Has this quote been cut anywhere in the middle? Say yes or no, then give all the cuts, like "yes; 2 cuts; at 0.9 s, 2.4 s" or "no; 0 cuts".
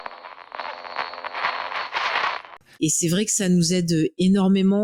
yes; 1 cut; at 2.7 s